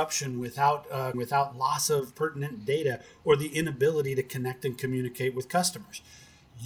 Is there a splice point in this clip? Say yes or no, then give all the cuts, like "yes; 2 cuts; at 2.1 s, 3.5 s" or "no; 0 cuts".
yes; 1 cut; at 1.1 s